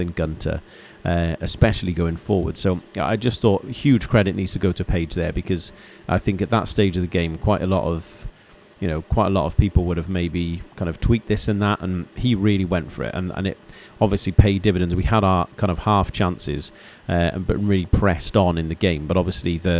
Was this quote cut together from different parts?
yes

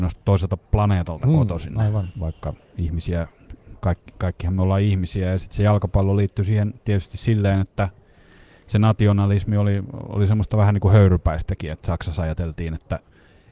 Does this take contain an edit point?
no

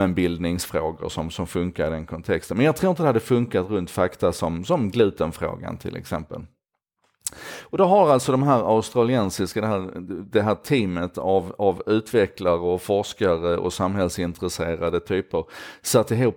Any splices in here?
no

